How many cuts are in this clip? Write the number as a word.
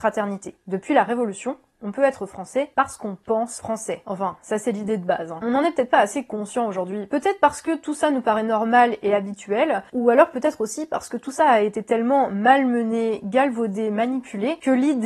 zero